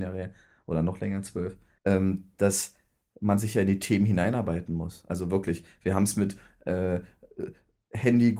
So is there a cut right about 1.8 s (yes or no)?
yes